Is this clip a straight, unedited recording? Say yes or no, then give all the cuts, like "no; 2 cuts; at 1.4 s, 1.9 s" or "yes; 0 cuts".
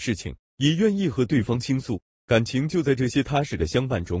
no; 1 cut; at 2.2 s